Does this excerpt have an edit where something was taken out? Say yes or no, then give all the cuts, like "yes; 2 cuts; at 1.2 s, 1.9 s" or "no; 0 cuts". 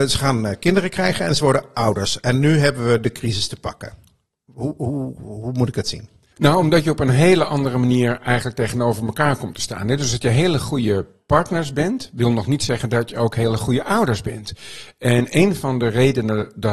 no; 0 cuts